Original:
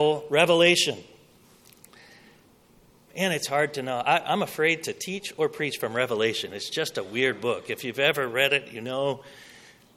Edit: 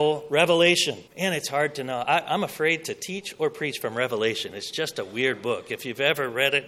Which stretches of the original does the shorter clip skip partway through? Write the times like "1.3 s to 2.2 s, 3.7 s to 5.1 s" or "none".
1.1 s to 3.1 s